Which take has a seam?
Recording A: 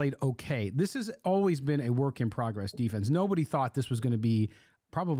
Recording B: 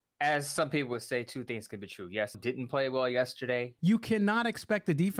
B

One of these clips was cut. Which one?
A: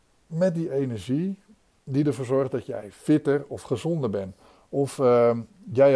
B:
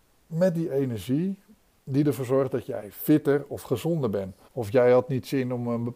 B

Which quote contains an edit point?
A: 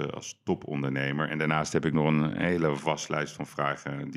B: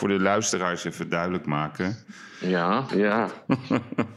B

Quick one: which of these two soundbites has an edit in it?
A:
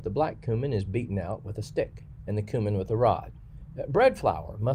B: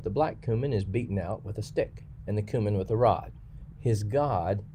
B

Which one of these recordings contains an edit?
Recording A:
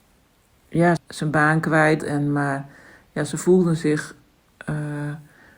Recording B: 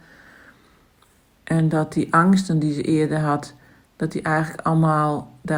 A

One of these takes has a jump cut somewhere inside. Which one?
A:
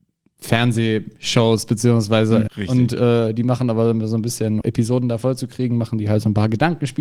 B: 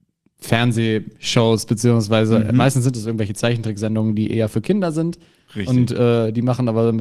A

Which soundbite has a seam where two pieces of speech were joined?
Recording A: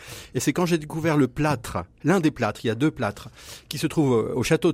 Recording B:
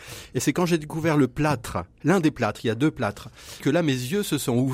B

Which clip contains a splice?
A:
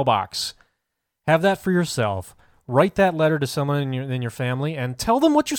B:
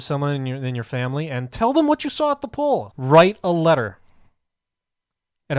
B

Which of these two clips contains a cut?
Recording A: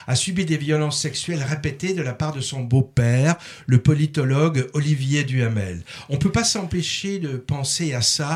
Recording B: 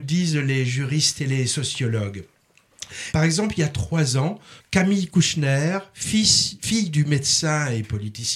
B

